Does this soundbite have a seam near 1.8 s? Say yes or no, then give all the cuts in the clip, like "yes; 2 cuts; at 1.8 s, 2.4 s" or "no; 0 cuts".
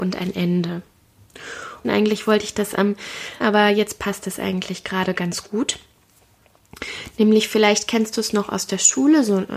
yes; 2 cuts; at 1.8 s, 3.4 s